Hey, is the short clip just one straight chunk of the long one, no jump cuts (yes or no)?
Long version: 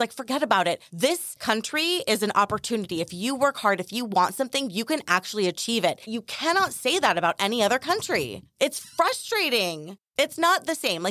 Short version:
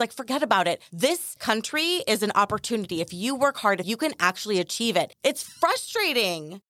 no